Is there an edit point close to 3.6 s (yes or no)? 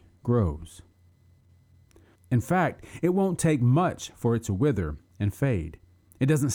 no